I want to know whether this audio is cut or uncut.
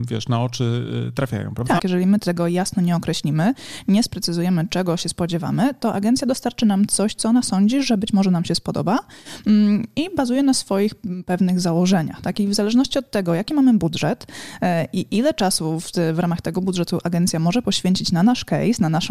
cut